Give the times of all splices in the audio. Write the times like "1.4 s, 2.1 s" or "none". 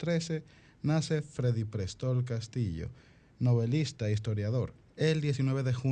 4.8 s